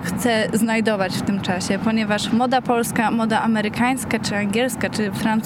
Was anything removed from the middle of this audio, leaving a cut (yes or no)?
no